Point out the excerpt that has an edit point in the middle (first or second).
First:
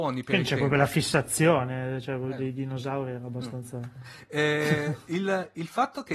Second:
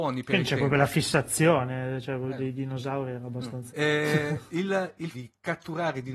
second